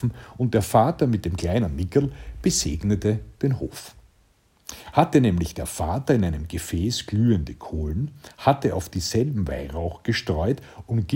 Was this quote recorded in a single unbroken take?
yes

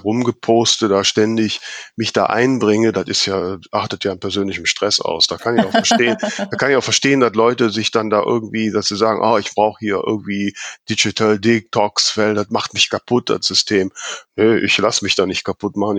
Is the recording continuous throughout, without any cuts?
yes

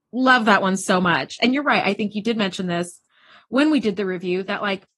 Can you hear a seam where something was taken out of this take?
no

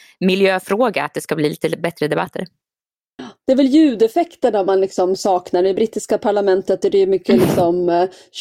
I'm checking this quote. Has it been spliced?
no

